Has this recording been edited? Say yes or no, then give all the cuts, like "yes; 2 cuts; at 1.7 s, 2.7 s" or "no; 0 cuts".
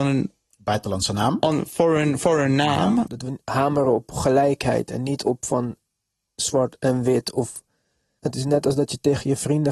yes; 2 cuts; at 3.1 s, 8.2 s